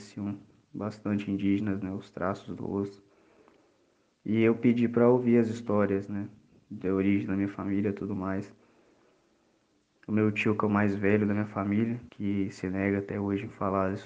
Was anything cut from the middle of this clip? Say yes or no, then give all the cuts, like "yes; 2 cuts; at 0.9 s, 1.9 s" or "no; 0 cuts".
yes; 2 cuts; at 10.0 s, 12.1 s